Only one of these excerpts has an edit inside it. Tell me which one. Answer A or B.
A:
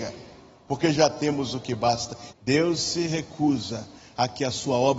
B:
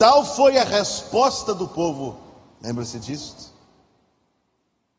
A